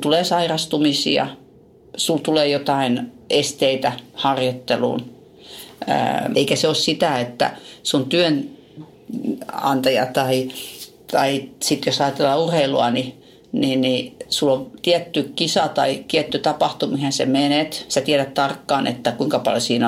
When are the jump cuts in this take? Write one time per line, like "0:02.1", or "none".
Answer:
0:06.3